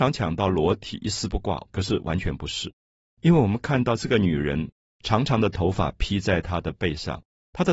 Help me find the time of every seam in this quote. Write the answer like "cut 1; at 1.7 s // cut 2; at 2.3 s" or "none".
cut 1; at 1.7 s